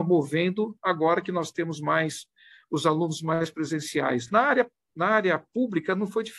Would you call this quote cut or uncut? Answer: uncut